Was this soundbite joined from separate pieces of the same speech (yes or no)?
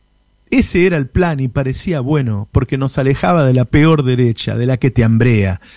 no